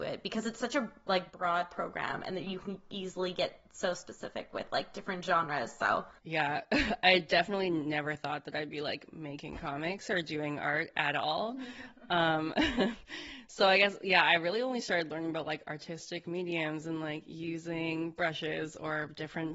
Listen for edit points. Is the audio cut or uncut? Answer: uncut